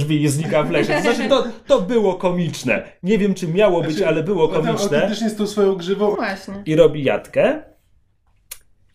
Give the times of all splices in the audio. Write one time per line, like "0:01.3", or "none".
0:06.1